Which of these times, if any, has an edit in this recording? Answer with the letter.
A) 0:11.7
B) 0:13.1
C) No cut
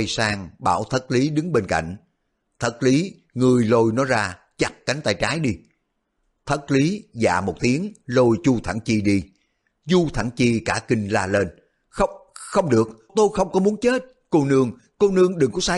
B